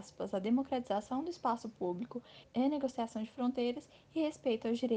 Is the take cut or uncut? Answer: cut